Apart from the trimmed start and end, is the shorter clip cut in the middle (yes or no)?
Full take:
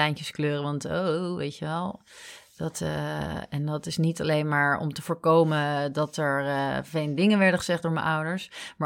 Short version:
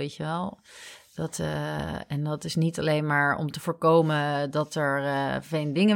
no